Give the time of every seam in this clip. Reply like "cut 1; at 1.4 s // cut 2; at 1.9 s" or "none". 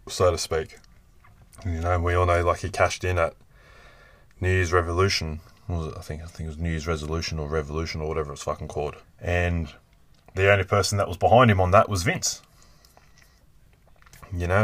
cut 1; at 9.0 s

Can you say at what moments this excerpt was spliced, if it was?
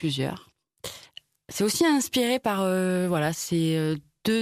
none

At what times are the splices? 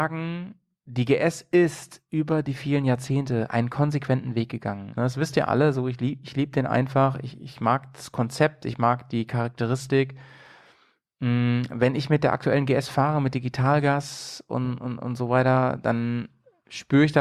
cut 1; at 5.0 s

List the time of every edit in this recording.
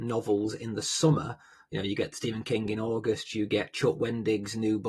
none

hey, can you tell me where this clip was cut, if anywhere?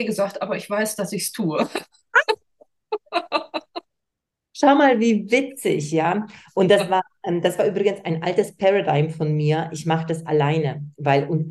none

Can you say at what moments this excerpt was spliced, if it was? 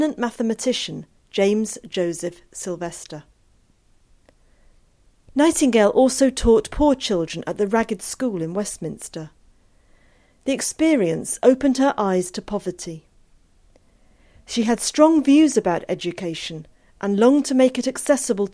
cut 1; at 5.3 s

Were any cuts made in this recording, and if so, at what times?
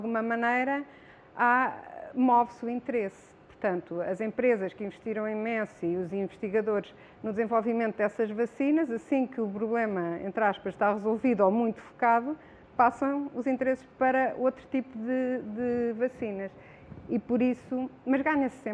none

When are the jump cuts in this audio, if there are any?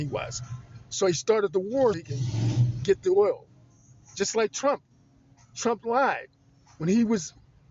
cut 1; at 1.9 s

